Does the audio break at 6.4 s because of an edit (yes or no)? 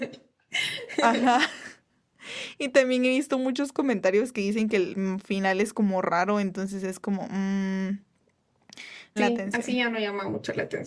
no